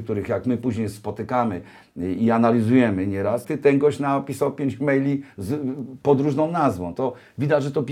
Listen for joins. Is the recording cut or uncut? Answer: cut